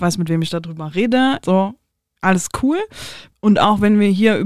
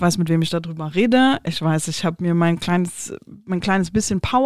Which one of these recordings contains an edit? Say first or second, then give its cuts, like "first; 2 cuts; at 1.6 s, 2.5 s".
first; 2 cuts; at 1.4 s, 3.3 s